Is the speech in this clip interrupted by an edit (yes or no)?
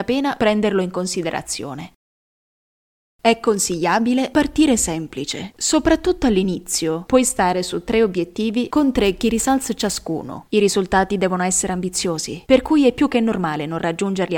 no